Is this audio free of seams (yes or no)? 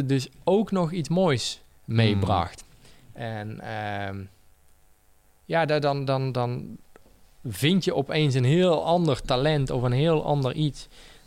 yes